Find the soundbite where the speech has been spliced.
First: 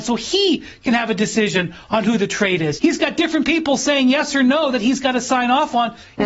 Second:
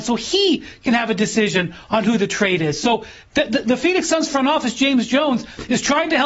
first; 1 cut; at 2.8 s

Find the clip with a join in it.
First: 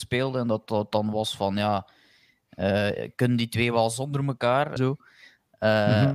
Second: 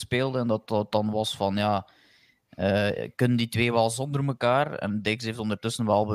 first; 1 cut; at 4.8 s

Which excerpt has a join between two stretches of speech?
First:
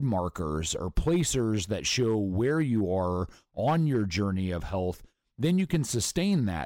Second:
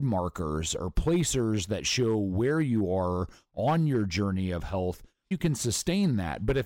second; 1 cut; at 5.3 s

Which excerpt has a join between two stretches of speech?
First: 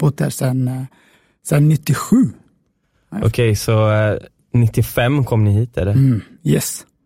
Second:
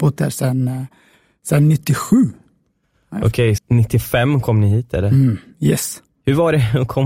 second; 1 cut; at 3.6 s

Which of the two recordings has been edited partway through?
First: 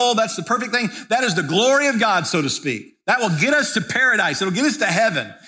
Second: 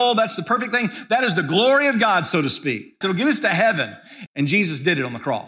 second; 2 cuts; at 3.0 s, 4.3 s

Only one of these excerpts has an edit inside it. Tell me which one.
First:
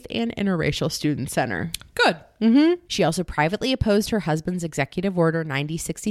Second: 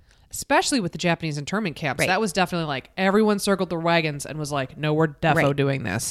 first; 1 cut; at 2.9 s

